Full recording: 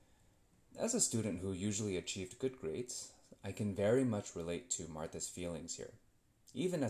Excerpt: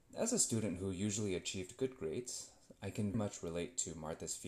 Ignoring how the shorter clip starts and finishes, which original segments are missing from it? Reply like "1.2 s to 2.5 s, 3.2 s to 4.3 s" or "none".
3.8 s to 4.1 s